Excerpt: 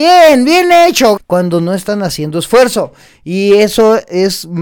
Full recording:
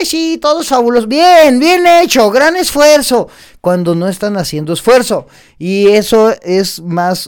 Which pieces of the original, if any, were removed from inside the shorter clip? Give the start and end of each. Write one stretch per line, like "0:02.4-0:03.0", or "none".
0:02.3-0:03.5